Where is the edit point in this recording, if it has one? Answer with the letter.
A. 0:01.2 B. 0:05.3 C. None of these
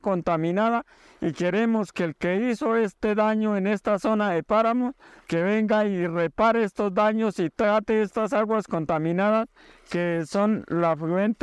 B